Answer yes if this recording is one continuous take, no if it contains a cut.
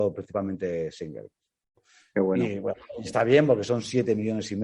yes